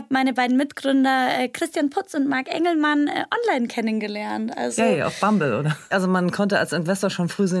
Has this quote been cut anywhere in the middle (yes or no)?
yes